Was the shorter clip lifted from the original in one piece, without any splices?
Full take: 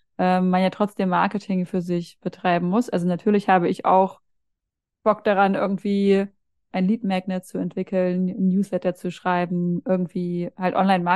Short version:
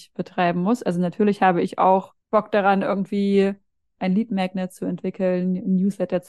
no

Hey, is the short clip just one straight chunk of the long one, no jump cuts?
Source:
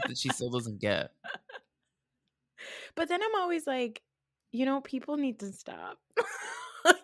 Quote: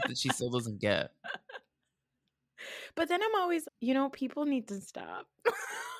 no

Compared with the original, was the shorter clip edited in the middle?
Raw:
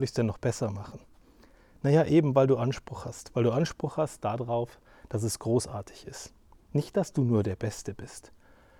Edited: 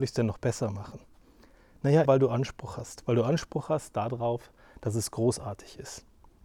yes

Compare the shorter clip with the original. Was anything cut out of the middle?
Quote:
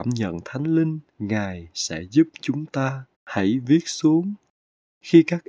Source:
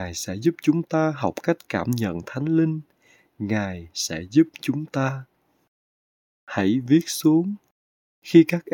yes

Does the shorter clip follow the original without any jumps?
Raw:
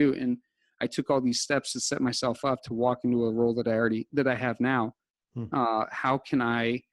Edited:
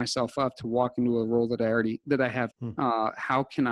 no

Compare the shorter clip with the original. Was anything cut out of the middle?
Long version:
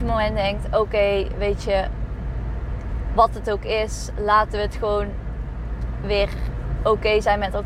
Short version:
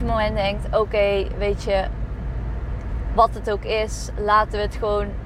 no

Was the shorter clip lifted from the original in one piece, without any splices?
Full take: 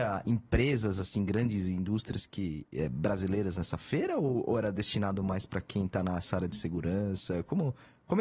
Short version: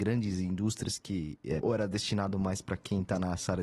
no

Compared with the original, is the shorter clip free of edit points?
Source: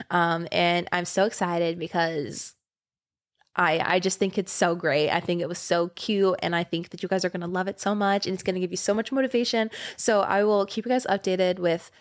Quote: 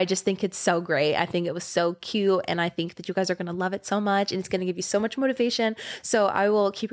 yes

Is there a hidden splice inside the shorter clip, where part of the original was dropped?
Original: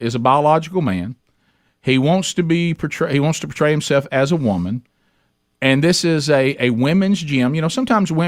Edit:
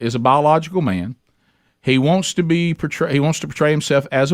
no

